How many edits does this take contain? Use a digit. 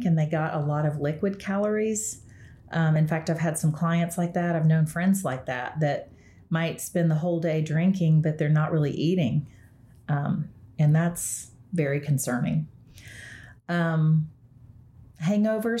0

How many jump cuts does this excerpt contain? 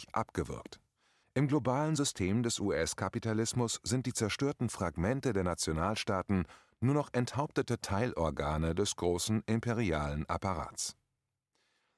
1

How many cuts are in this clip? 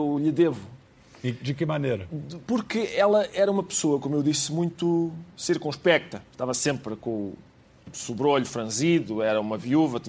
0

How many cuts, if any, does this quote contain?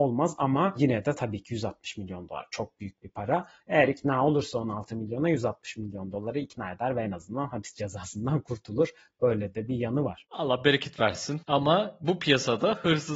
2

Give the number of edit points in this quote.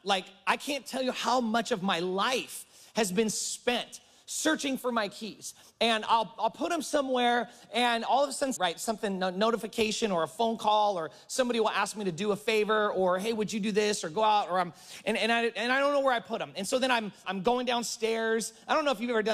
2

